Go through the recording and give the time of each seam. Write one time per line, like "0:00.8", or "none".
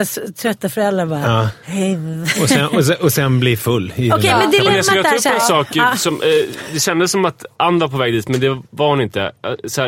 none